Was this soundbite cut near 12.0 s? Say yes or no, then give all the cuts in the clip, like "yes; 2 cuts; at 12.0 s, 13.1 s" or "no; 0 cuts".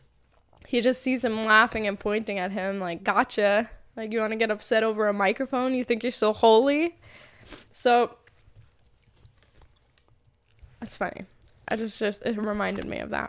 no; 0 cuts